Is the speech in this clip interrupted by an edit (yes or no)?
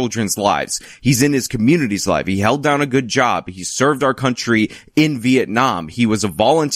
no